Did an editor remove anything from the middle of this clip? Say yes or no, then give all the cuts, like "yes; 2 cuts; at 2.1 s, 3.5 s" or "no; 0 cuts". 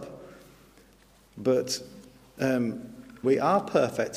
yes; 1 cut; at 3.2 s